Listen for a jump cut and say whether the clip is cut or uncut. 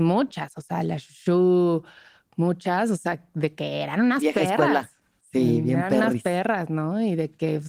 uncut